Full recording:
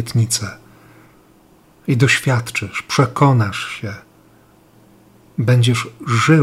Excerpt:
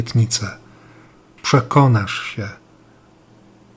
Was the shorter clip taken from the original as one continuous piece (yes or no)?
no